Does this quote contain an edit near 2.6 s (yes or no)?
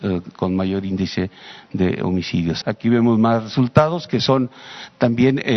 yes